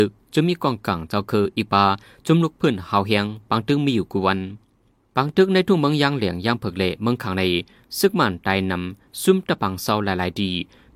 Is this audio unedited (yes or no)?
yes